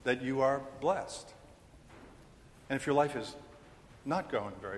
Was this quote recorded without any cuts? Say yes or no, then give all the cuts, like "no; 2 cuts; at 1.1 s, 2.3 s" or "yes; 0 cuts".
yes; 0 cuts